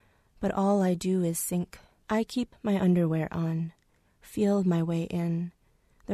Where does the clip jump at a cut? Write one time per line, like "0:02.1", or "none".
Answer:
0:02.0